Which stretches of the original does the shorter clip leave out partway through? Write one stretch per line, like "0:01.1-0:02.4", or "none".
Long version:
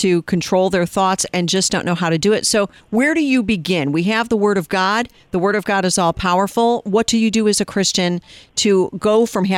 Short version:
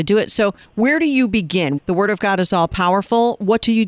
0:03.9-0:05.2